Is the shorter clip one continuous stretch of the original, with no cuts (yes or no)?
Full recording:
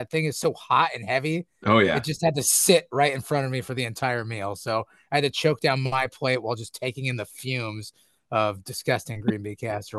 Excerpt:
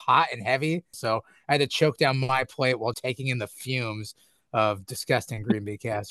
no